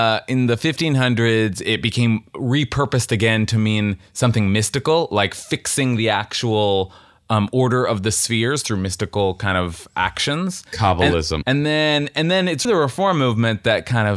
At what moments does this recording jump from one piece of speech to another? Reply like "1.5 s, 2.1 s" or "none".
11.4 s, 12.7 s